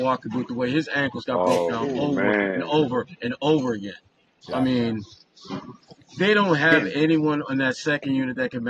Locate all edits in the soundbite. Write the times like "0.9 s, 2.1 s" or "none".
none